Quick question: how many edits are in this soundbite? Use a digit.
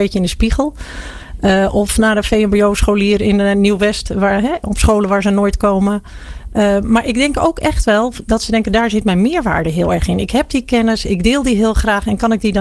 0